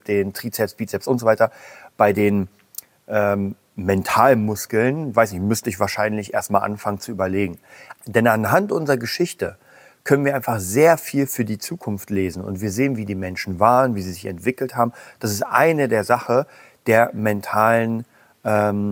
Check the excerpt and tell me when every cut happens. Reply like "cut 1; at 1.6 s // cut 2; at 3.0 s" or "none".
cut 1; at 8.0 s